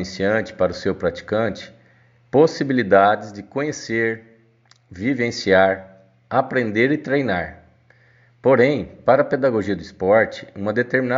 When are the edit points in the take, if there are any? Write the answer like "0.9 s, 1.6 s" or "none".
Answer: 8.3 s